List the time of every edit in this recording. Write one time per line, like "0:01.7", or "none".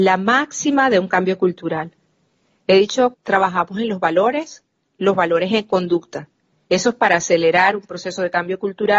0:03.1
0:06.7